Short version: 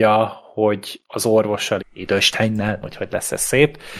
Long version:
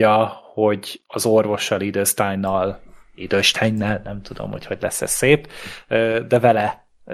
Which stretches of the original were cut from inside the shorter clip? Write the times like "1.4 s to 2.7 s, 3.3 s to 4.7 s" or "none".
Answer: 1.8 s to 3.0 s, 4.0 s to 4.5 s